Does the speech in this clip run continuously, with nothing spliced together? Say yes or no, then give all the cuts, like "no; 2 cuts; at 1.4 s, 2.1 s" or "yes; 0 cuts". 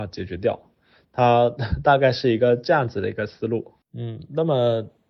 no; 1 cut; at 3.8 s